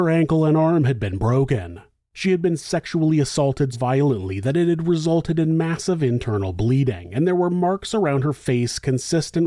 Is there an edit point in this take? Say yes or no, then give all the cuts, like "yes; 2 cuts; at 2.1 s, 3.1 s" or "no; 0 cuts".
yes; 1 cut; at 3.7 s